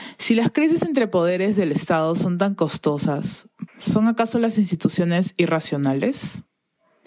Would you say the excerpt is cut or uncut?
cut